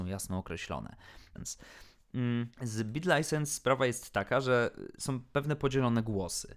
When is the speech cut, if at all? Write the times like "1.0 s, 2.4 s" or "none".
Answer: 1.4 s, 2.5 s